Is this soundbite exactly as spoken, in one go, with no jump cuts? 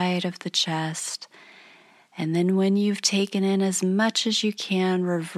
yes; 0 cuts

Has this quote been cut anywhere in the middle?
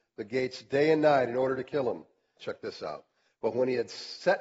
yes; 1 cut; at 2.4 s

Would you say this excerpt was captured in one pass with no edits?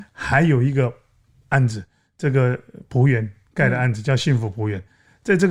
yes; 0 cuts

